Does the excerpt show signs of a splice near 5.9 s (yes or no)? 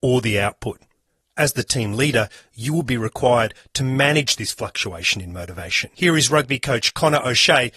yes